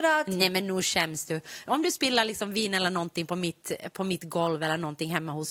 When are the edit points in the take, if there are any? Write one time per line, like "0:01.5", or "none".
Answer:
none